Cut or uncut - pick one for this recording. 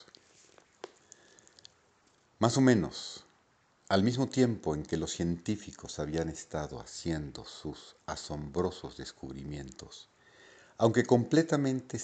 uncut